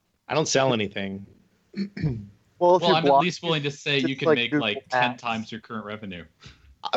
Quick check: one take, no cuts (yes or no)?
no